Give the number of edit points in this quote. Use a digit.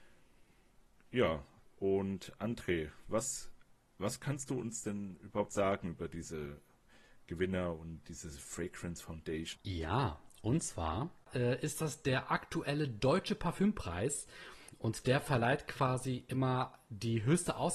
2